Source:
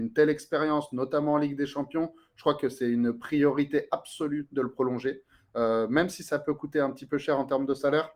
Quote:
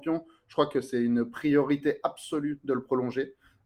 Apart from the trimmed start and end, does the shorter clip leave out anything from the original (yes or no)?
no